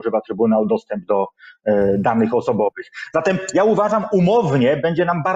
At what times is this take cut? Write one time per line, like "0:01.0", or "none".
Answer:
none